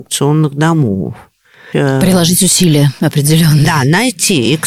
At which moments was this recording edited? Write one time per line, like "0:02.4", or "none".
0:01.7